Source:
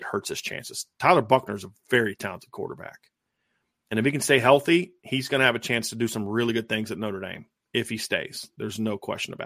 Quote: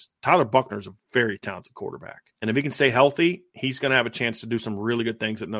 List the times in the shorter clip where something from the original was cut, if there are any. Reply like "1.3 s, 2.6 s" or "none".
2.3 s

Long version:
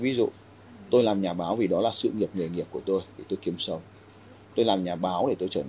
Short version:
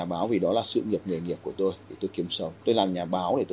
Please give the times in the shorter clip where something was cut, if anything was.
2.6 s

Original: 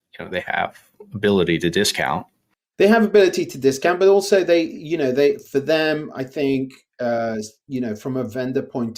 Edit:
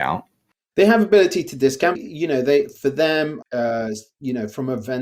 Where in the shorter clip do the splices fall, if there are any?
2.0 s, 3.4 s

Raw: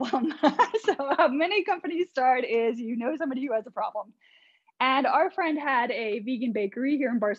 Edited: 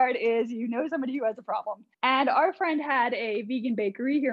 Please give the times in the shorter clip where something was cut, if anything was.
1.9 s

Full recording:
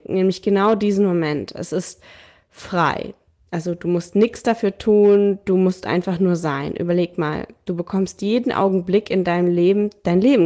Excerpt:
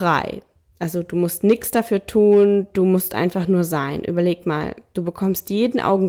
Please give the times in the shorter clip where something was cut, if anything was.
none

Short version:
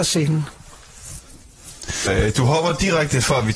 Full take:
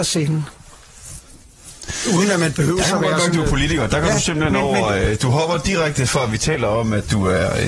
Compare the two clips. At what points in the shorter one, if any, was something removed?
2.1 s

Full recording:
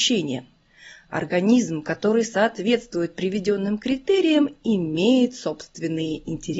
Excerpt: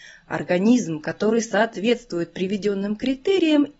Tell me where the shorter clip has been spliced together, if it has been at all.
none

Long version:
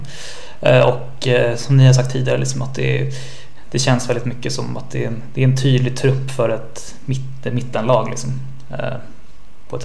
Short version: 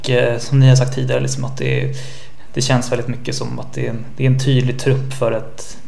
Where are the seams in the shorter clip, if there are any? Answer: none

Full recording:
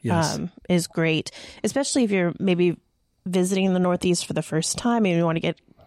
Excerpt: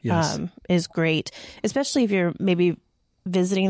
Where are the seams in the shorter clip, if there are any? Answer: none

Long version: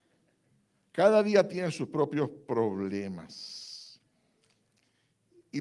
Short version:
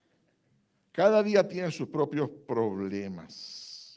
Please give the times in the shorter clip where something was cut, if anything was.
none

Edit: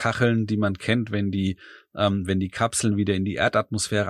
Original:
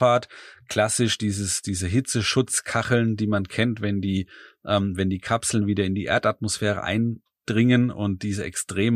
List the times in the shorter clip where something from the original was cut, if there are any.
none

